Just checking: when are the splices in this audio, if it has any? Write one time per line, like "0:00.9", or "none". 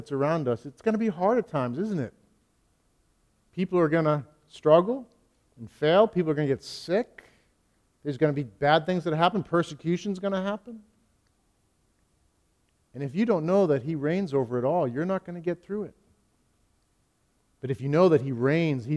none